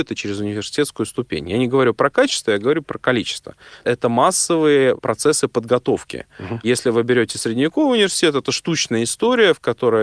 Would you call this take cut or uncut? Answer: uncut